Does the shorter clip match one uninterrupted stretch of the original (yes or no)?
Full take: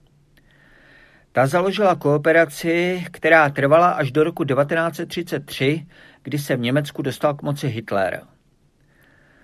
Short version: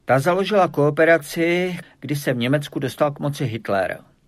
no